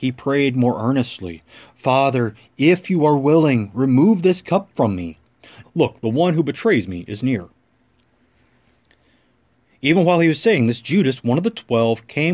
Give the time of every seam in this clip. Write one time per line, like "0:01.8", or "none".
0:05.6

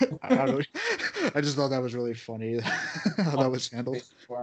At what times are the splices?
none

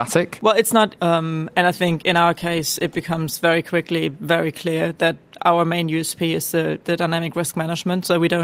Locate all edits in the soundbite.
0:01.0

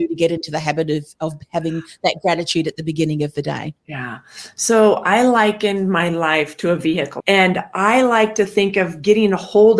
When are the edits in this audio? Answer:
0:03.8
0:07.2

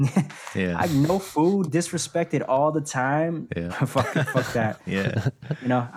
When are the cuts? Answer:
0:01.7
0:03.7

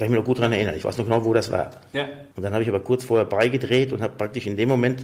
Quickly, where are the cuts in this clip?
0:02.3

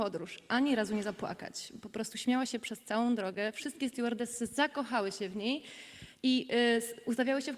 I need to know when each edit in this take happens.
none

